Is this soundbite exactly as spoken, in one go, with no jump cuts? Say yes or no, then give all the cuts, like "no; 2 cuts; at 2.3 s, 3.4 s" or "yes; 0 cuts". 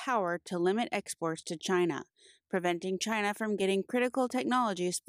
yes; 0 cuts